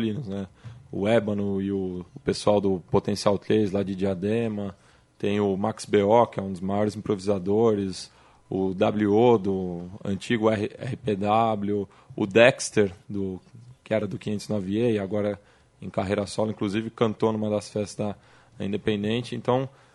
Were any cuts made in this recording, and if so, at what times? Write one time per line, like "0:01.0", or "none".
0:02.1